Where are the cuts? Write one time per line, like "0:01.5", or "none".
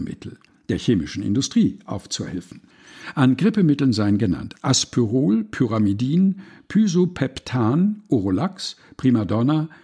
none